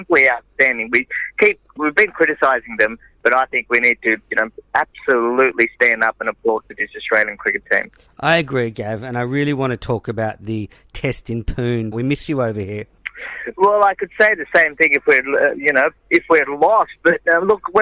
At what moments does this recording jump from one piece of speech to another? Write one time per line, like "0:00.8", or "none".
0:11.9
0:16.0